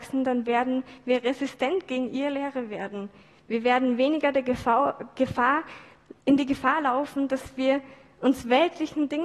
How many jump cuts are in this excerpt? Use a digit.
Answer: 0